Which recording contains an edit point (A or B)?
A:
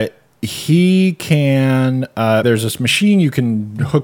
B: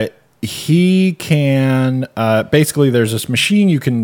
A